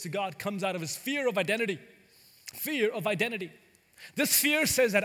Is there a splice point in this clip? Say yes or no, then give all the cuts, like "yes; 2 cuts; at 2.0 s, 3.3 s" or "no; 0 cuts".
no; 0 cuts